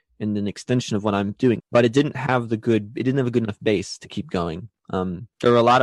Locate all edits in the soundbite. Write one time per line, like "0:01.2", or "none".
0:01.6